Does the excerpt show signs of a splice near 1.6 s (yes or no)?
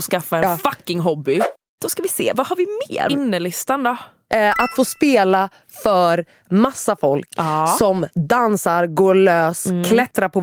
no